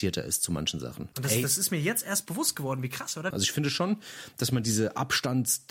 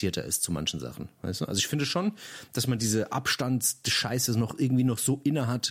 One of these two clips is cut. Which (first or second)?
first